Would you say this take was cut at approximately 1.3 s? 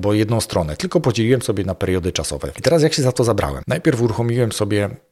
no; 2 cuts; at 2.5 s, 3.6 s

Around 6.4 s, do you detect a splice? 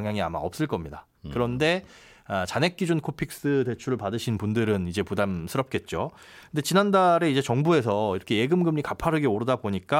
no; 0 cuts

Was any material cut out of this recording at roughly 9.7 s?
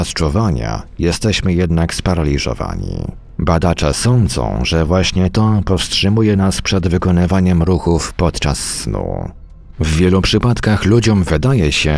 yes; 1 cut; at 9.7 s

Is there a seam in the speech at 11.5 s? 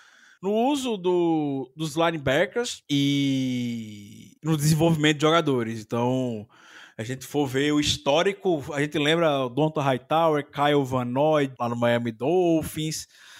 yes; 1 cut; at 11.5 s

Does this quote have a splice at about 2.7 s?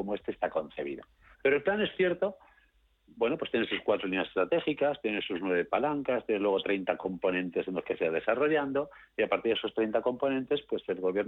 no; 1 cut; at 1.3 s

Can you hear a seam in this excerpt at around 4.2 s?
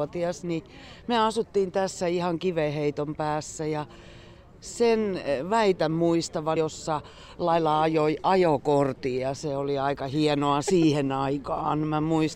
no; 1 cut; at 6.6 s

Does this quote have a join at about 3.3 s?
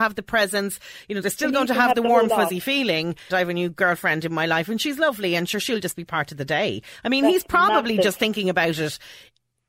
yes; 1 cut; at 3.3 s

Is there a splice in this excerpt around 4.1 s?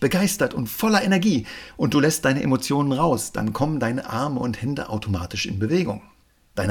no; 0 cuts

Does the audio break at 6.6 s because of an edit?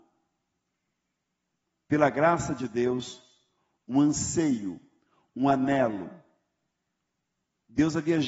no; 0 cuts

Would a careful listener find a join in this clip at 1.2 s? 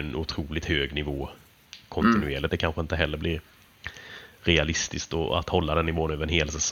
no; 1 cut; at 2.5 s

